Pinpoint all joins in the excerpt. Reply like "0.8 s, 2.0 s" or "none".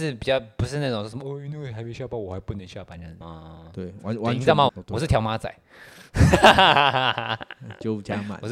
3.2 s, 4.7 s